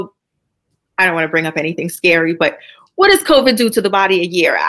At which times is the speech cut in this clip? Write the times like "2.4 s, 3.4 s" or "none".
none